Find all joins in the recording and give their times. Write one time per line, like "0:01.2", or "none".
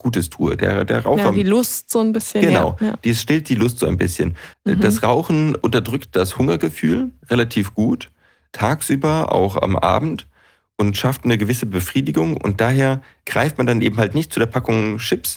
0:04.5